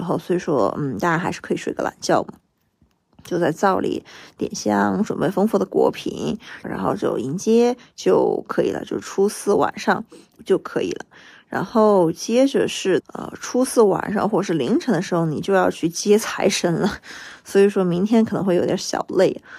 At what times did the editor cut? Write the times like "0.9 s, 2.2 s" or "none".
6.6 s, 10.4 s, 13.0 s